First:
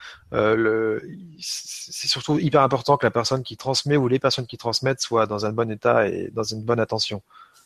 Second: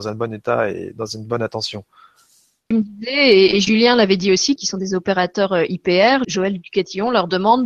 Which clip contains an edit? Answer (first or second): second